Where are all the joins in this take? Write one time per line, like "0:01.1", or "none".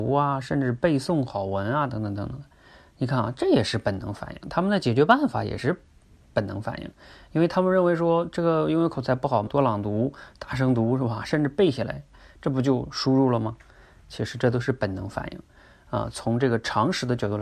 0:09.5